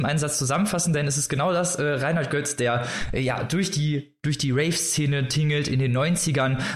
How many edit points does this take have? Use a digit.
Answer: 0